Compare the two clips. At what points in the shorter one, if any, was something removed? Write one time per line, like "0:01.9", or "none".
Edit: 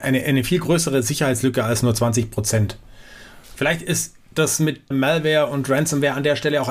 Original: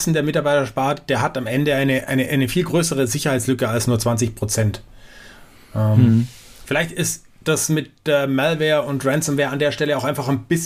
0:03.4
0:04.9